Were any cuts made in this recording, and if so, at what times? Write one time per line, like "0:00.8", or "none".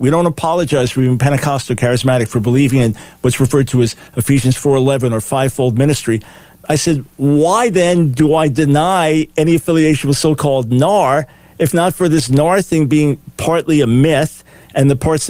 none